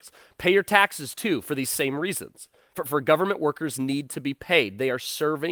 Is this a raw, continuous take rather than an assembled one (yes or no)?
yes